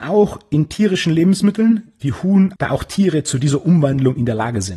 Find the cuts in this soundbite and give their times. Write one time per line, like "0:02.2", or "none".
0:02.6